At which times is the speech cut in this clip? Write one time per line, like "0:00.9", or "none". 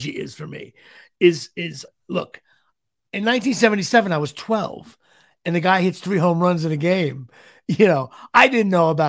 0:01.9